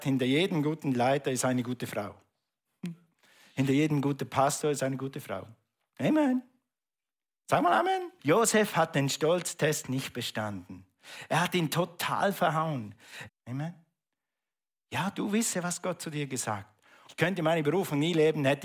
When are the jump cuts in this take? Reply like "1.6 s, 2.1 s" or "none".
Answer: 8.2 s, 13.3 s, 17.1 s